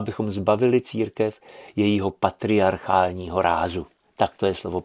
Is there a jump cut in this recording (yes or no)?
no